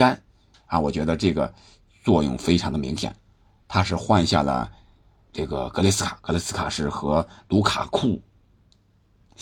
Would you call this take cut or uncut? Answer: uncut